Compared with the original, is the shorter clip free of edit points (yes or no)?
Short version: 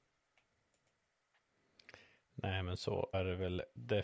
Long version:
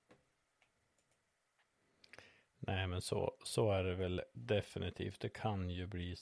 no